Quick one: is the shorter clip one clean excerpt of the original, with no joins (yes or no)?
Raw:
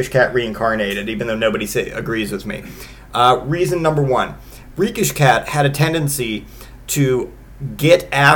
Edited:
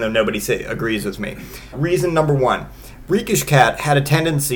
no